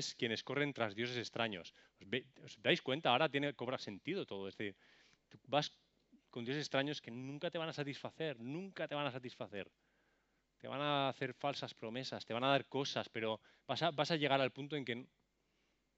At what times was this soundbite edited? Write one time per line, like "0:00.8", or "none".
none